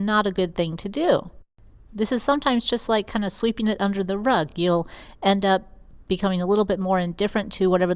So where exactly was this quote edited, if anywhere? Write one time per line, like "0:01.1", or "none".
none